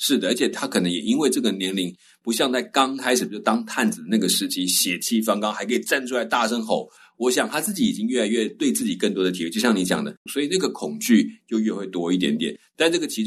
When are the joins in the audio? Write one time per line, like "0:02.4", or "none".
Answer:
0:10.3